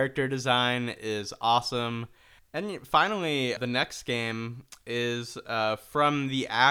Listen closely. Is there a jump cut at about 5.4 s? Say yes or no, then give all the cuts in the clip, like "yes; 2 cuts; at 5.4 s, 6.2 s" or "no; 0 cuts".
no; 2 cuts; at 2.4 s, 3.6 s